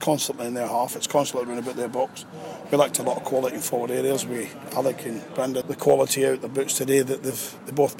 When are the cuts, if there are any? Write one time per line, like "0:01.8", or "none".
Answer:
0:05.6